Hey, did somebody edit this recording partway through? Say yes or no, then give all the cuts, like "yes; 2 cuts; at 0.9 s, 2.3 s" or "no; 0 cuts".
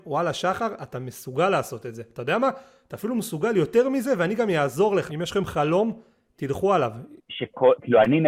yes; 2 cuts; at 5.1 s, 7.2 s